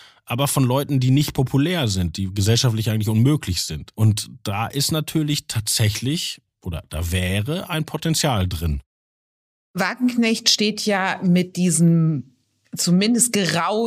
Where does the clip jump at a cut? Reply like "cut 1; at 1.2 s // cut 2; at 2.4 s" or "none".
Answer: cut 1; at 3.9 s